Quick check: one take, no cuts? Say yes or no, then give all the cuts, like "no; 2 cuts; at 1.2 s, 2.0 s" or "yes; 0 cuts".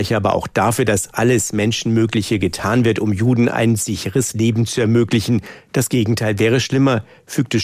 yes; 0 cuts